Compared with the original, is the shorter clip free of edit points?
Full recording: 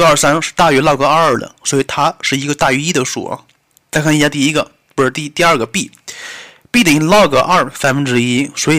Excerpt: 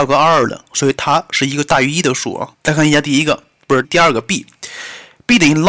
no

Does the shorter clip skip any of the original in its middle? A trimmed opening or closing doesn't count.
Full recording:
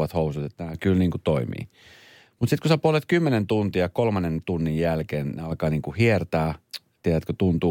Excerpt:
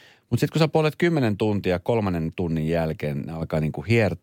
no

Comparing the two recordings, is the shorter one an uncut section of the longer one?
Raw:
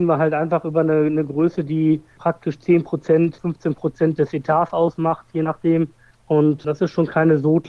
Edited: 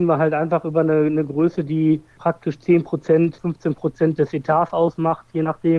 yes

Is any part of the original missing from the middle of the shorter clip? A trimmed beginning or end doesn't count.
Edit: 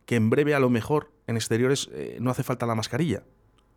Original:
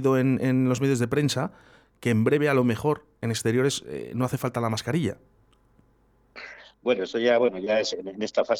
no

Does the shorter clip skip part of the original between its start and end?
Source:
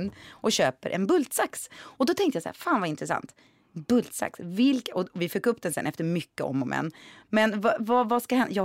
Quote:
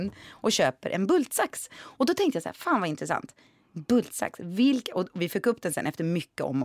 no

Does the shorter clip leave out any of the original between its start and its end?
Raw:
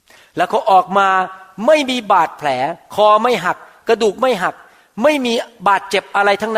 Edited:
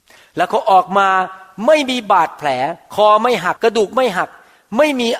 yes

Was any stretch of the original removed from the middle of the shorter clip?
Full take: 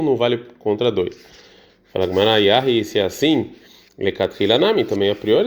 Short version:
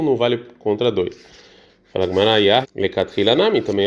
yes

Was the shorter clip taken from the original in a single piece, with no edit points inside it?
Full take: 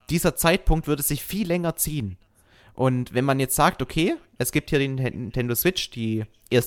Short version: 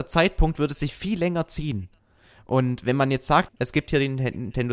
no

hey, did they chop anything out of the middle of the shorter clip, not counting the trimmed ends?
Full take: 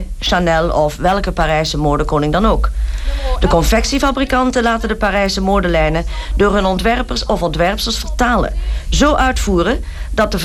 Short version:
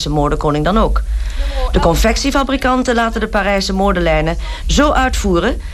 yes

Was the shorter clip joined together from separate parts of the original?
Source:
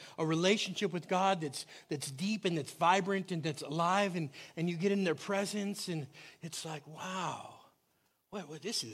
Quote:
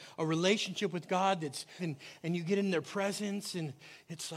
yes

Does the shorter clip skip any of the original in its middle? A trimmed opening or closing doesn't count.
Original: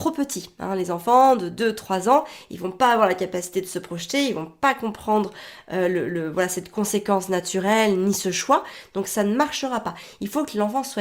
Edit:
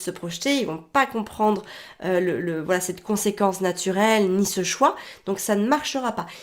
no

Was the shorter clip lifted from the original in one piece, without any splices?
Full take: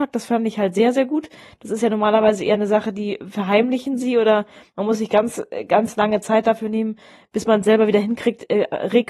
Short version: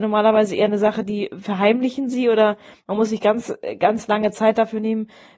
yes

